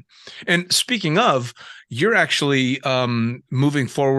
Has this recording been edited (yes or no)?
no